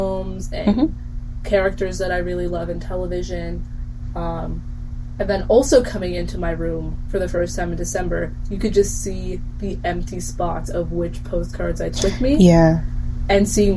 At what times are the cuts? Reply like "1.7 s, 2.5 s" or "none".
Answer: none

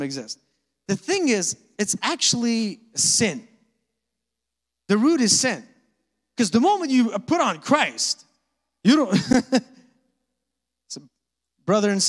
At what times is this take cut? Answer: none

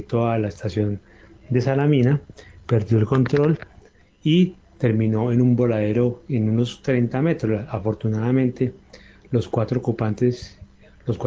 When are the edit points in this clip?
none

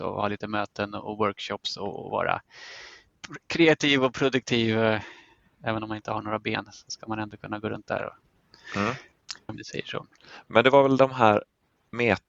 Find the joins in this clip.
9.5 s

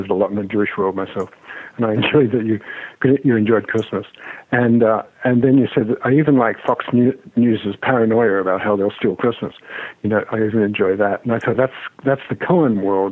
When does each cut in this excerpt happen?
11.5 s

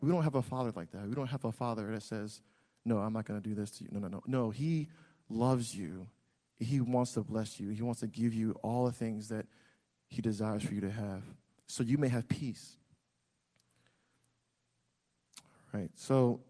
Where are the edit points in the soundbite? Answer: none

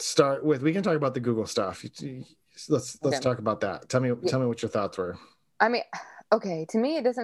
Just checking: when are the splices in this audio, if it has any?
none

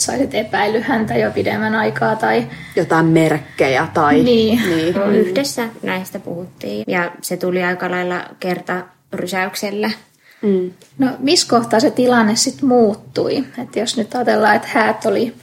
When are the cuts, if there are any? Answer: 4.9 s, 6.8 s, 10.9 s

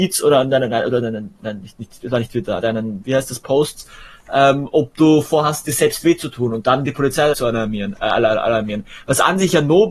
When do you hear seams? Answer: 2.6 s, 7.3 s

